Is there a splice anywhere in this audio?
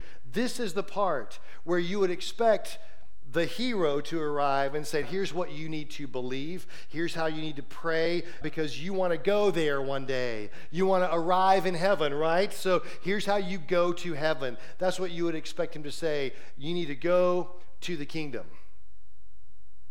yes; 2 cuts; at 5.0 s, 8.4 s

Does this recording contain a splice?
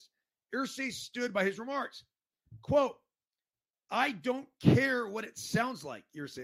no; 0 cuts

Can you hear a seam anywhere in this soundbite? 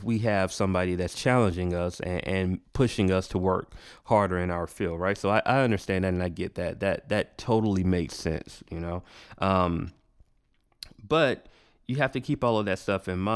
no; 0 cuts

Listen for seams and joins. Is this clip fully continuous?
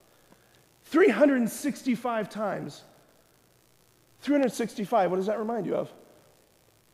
yes; 0 cuts

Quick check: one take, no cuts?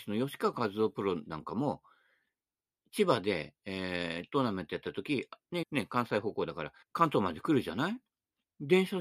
no; 2 cuts; at 5.6 s, 6.8 s

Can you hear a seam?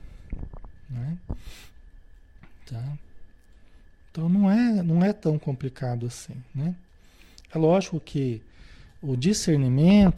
no; 0 cuts

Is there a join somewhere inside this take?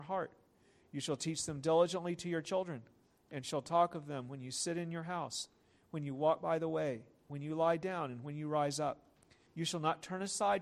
yes; 1 cut; at 9.5 s

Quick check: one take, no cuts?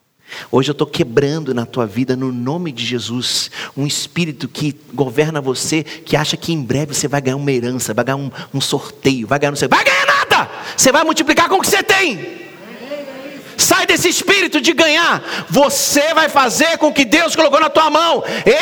yes; 0 cuts

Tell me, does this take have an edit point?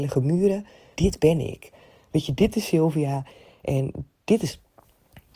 yes; 1 cut; at 0.9 s

